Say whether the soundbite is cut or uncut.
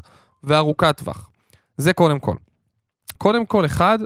cut